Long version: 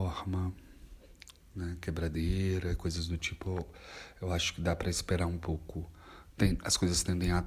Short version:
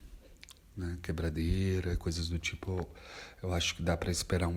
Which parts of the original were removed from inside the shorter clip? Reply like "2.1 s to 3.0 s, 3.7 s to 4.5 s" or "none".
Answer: none